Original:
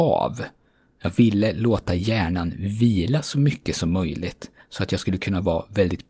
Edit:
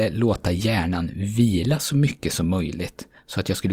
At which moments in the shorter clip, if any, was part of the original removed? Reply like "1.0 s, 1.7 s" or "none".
none